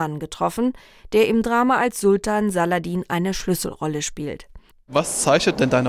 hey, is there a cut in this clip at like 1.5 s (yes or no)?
no